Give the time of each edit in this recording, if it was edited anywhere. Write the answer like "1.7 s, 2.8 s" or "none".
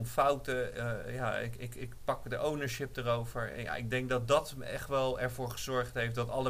none